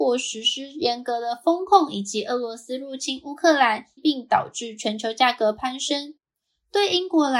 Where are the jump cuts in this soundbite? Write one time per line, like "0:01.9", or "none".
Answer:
0:04.0

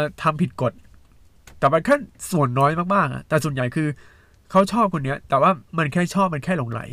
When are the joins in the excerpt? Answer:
0:05.7

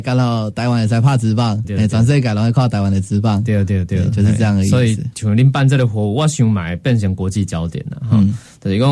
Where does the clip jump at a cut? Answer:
0:01.6

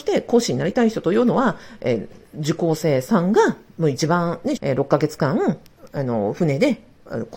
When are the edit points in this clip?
0:04.6

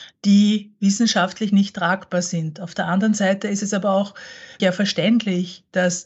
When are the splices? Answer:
0:04.6

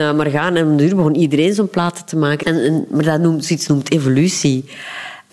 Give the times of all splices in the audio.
0:02.4

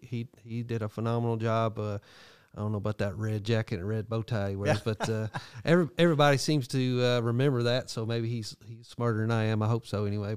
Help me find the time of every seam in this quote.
none

